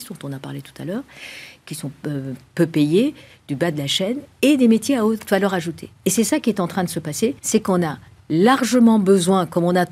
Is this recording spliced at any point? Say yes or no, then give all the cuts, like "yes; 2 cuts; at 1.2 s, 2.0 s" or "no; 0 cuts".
yes; 1 cut; at 7.4 s